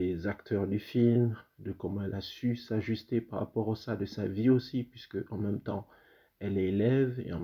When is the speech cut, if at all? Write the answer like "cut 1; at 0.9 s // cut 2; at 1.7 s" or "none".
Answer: none